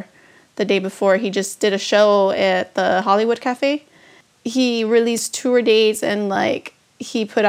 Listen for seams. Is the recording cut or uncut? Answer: uncut